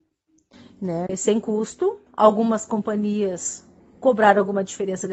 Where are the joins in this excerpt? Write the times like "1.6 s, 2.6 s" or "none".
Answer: 1.1 s